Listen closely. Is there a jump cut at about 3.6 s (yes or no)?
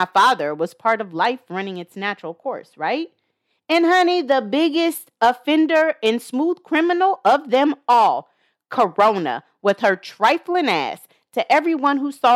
no